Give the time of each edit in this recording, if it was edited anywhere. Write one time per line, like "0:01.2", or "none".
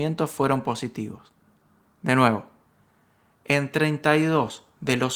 none

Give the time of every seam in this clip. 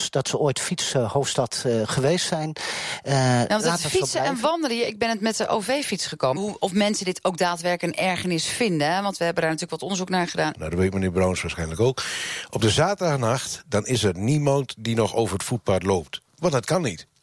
0:06.4
0:10.5

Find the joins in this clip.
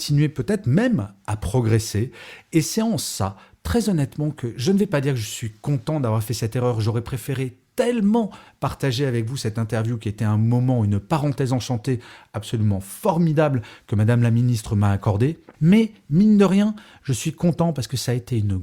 none

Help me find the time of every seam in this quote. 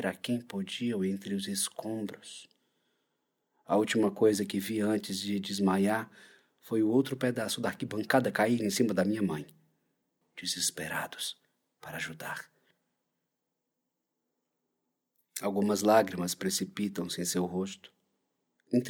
0:10.2

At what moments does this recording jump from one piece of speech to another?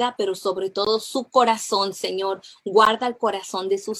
none

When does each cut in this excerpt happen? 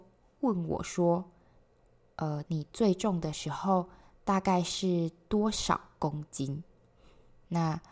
0:02.4

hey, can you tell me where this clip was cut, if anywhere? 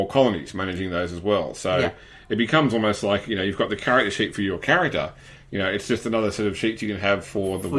0:05.4

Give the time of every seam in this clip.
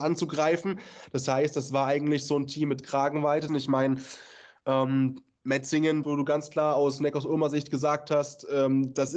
0:03.5
0:06.0

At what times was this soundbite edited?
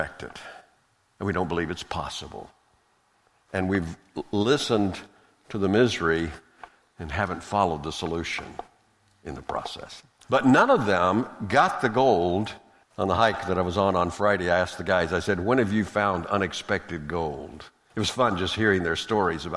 0:10.2
0:12.8
0:17.9

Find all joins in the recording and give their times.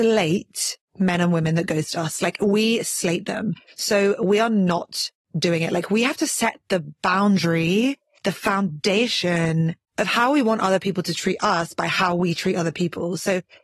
0:09.8

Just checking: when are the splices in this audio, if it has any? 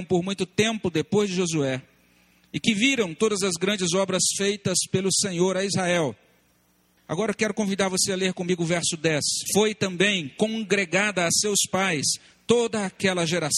0:07.0
0:09.5

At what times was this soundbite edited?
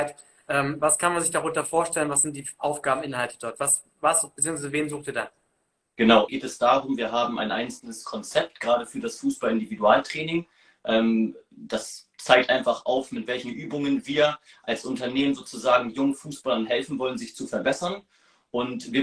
0:06.3

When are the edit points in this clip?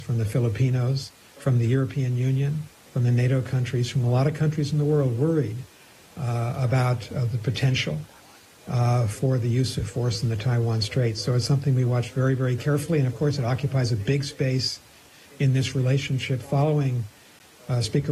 none

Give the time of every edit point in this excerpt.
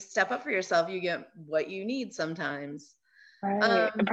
none

